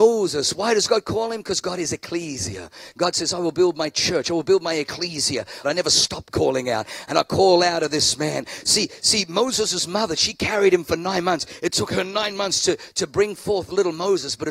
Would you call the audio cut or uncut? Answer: cut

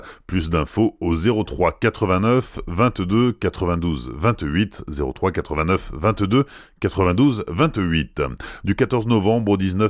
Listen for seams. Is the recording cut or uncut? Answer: cut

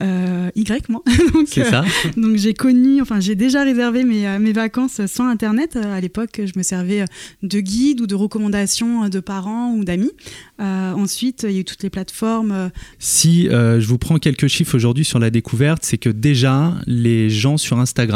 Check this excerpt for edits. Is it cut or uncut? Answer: cut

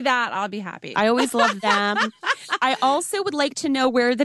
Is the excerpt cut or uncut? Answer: cut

